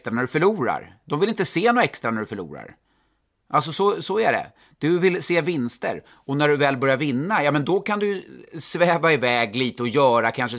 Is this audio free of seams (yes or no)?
yes